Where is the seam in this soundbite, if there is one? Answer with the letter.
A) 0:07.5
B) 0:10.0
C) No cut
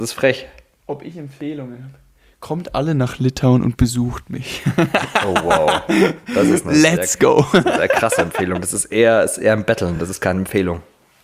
C